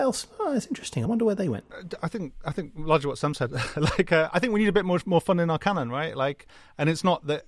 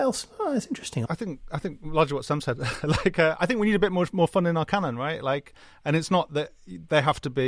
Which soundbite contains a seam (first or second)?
second